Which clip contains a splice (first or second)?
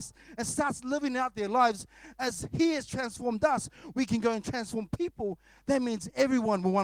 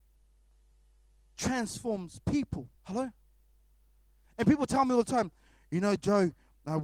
second